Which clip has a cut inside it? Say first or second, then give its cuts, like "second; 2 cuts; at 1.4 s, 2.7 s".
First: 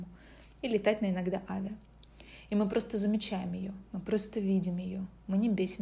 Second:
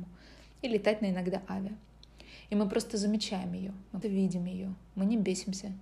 second; 1 cut; at 4.0 s